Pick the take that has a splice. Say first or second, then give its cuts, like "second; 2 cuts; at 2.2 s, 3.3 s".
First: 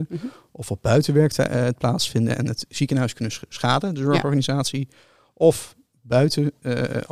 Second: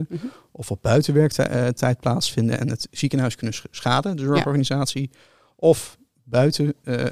first; 1 cut; at 1.7 s